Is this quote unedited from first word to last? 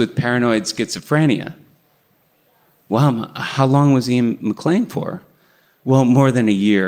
yes; 0 cuts

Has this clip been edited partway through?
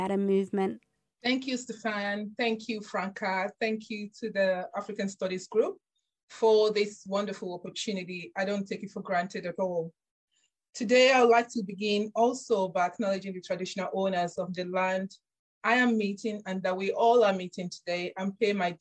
no; 0 cuts

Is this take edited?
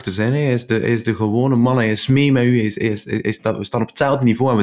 no; 0 cuts

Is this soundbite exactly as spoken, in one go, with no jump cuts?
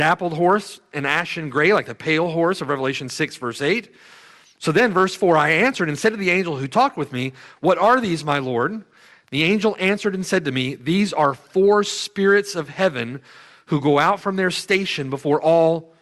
yes; 0 cuts

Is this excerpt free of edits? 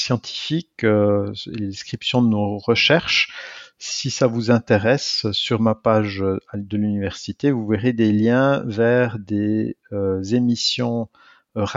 yes; 0 cuts

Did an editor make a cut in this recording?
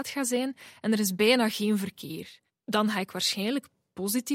no; 0 cuts

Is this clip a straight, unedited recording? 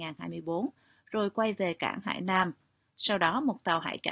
yes; 0 cuts

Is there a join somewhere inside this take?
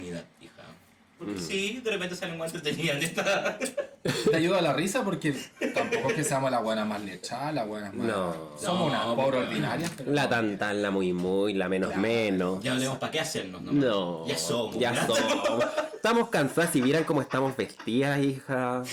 no; 0 cuts

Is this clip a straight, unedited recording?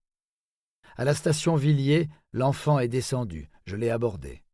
yes; 0 cuts

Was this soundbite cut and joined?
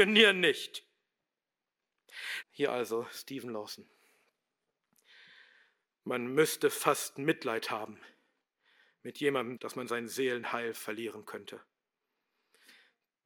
yes; 2 cuts; at 2.4 s, 9.6 s

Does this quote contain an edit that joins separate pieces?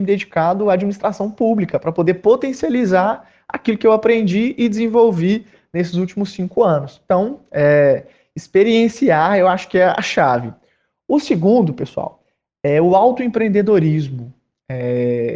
no; 0 cuts

